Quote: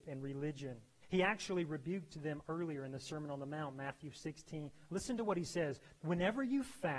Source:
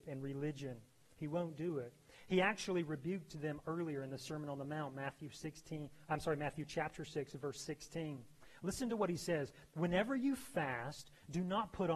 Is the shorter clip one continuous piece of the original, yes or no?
no